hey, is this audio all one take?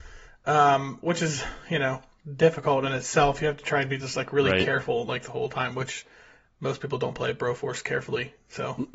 yes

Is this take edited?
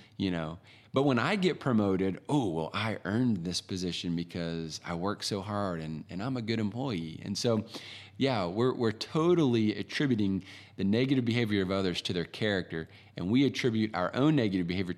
no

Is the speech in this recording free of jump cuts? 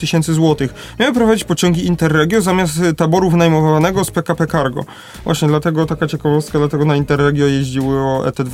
yes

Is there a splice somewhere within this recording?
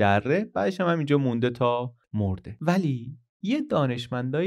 yes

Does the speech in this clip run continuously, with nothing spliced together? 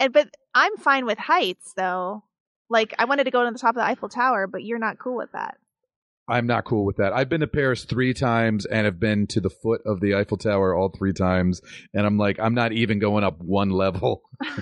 yes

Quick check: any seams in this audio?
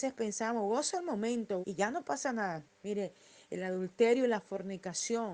yes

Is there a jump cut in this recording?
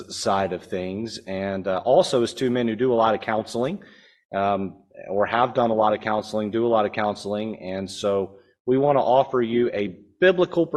no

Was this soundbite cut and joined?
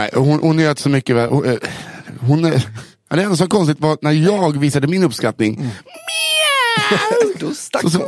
no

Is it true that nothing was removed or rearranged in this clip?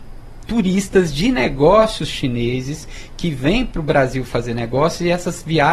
yes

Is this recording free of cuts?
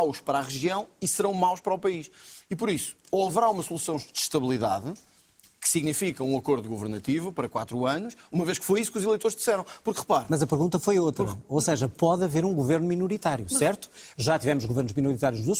yes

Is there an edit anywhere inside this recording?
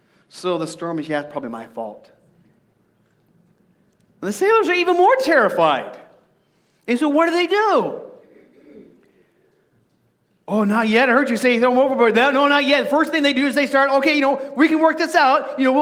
no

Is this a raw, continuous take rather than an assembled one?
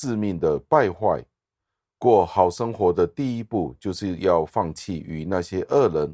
yes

